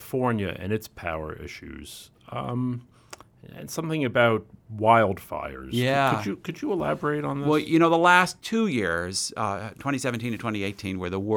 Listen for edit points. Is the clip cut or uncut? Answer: uncut